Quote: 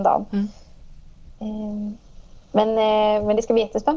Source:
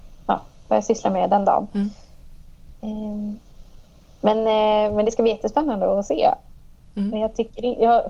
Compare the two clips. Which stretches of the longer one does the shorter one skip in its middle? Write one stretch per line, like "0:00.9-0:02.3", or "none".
0:03.9-0:04.1